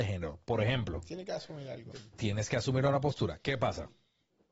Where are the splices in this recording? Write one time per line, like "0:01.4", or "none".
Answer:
0:01.9